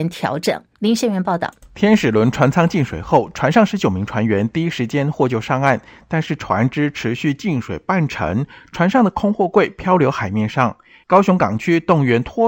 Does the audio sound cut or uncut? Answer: uncut